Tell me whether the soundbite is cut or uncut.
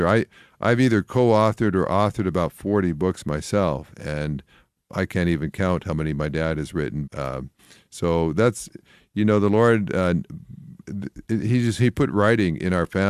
cut